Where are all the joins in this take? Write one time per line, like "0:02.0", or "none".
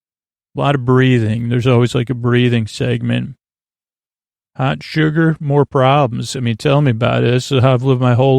none